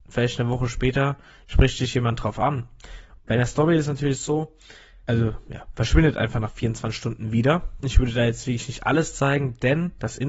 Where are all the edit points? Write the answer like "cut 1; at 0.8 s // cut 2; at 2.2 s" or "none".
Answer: cut 1; at 3.2 s // cut 2; at 5.1 s // cut 3; at 7.8 s